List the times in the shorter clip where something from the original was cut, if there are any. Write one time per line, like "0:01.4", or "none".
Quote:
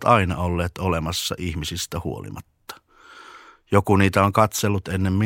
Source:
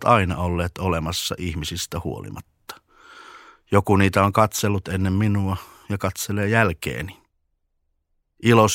none